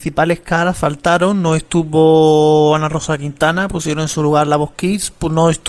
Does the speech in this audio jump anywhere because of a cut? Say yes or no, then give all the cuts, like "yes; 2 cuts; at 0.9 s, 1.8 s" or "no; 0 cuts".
no; 0 cuts